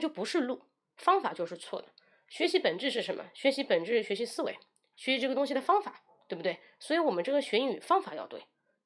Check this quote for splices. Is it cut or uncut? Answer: uncut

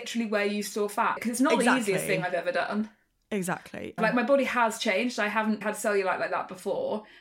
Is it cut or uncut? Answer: cut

